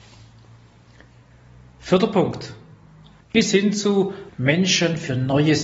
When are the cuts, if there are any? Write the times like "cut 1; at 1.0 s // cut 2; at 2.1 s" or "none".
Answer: cut 1; at 3.2 s // cut 2; at 4.3 s